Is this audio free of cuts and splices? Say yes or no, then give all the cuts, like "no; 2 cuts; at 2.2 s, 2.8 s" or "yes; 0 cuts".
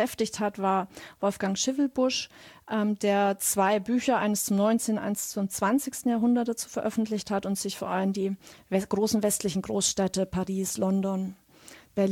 yes; 0 cuts